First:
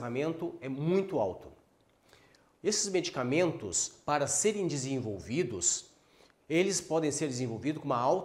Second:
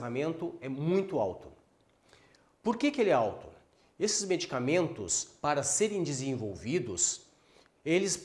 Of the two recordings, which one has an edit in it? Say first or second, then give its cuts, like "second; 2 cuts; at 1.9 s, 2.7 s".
first; 1 cut; at 2.5 s